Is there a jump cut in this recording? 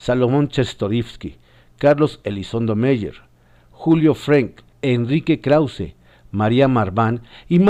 yes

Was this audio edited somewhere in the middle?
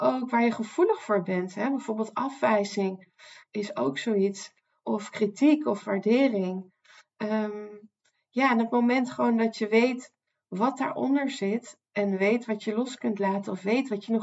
no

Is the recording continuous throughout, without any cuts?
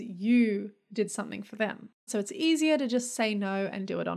no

